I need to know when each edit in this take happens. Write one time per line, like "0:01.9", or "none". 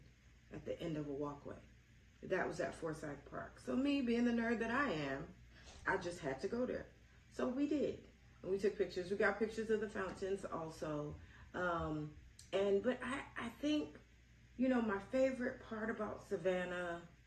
none